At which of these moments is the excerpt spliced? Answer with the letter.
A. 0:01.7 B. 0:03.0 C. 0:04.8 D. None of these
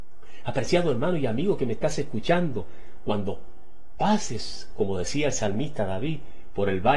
C